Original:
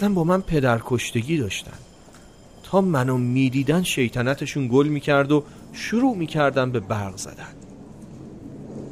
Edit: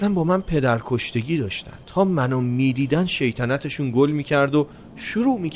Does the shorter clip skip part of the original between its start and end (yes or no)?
yes